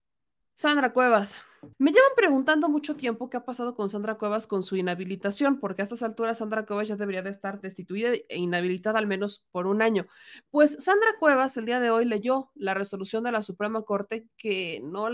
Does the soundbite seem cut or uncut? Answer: cut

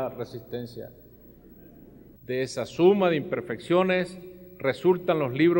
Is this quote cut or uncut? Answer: cut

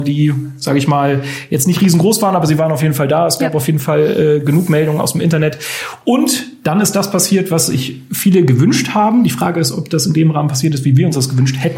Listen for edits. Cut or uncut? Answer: uncut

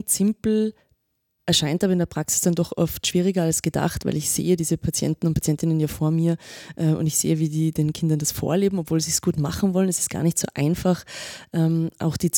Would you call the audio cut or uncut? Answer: uncut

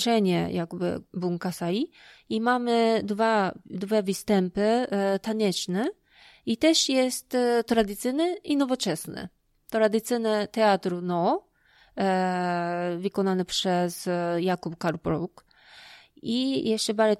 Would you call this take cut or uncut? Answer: uncut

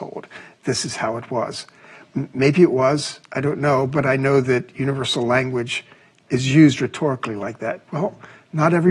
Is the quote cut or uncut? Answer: cut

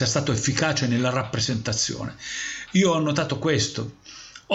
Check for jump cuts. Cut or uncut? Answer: uncut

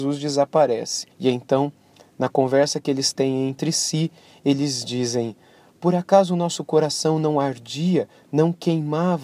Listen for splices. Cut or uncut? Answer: cut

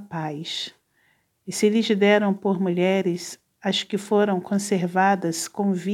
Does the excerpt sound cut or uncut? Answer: cut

